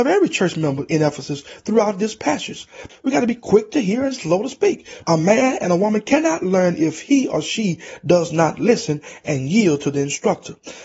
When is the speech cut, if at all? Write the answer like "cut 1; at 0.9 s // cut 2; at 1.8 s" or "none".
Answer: cut 1; at 2.9 s // cut 2; at 5.0 s